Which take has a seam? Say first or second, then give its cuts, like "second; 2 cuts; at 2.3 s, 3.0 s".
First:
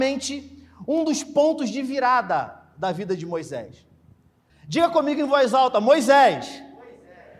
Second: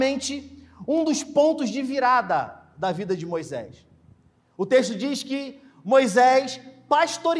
first; 1 cut; at 4.5 s